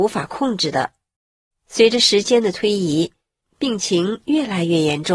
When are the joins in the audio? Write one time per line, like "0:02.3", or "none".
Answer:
none